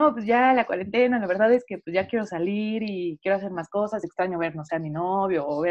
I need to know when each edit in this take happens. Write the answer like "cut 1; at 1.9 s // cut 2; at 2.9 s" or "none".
none